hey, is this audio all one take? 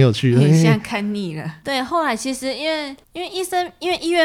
no; 2 cuts; at 1.6 s, 3.0 s

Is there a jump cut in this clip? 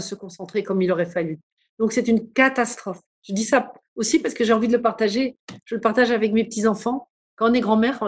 no; 0 cuts

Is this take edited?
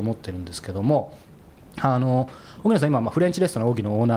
no; 0 cuts

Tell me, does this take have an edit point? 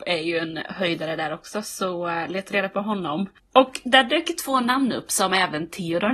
no; 0 cuts

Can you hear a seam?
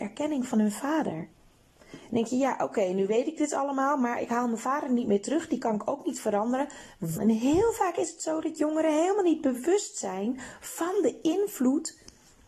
yes; 1 cut; at 7.2 s

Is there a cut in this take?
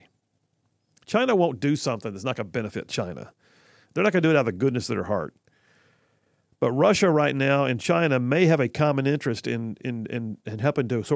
no; 0 cuts

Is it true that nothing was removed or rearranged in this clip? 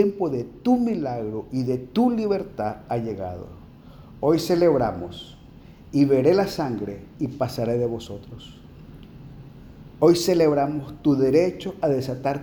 yes; 0 cuts

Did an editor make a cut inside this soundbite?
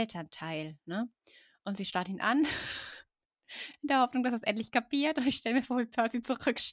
no; 0 cuts

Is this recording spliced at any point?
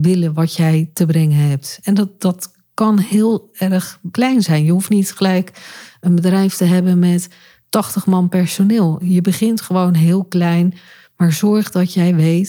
no; 0 cuts

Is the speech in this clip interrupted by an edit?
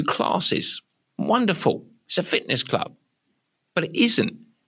no; 0 cuts

